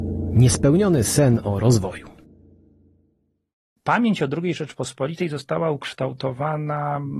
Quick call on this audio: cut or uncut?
cut